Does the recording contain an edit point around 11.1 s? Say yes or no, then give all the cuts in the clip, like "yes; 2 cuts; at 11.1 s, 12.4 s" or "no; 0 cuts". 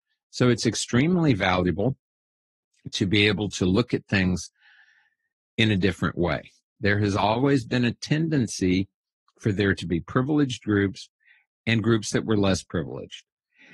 no; 1 cut; at 6.8 s